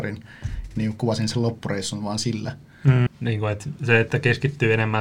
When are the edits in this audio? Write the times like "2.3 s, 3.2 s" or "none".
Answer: 3.1 s